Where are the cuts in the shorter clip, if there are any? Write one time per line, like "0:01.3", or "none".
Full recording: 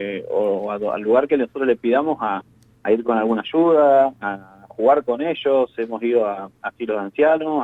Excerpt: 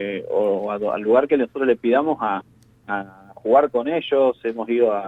0:02.8